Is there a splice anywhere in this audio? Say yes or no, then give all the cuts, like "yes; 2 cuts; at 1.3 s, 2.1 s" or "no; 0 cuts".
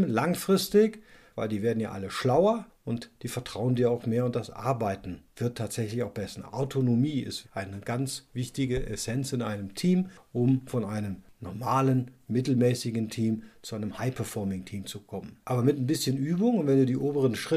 yes; 2 cuts; at 7.4 s, 15.4 s